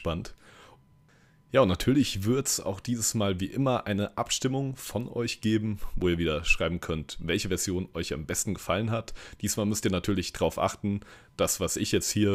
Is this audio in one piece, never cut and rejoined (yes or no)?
yes